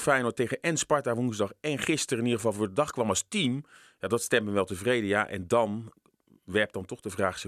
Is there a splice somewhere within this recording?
no; 0 cuts

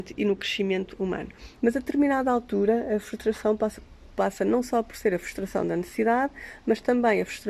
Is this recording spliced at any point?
yes; 1 cut; at 1.6 s

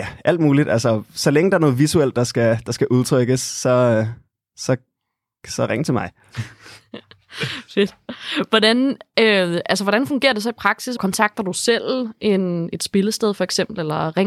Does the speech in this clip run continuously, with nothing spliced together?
no; 1 cut; at 11.0 s

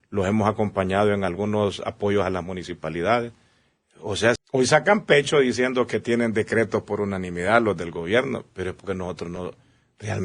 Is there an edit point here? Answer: yes; 1 cut; at 4.4 s

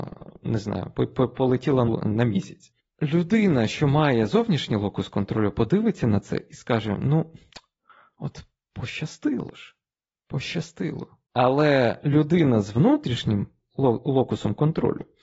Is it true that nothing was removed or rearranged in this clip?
no; 1 cut; at 1.9 s

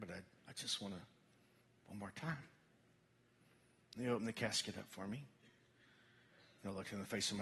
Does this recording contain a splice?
no; 0 cuts

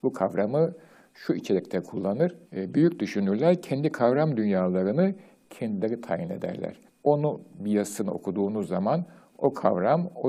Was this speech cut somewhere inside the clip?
yes; 2 cuts; at 2.4 s, 6.9 s

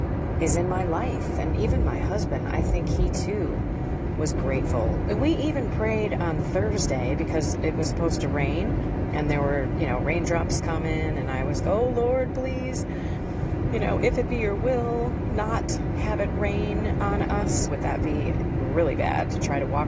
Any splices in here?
yes; 3 cuts; at 1.3 s, 11.6 s, 17.7 s

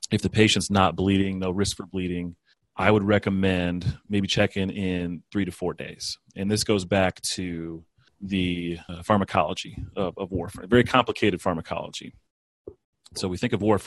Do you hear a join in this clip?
no; 0 cuts

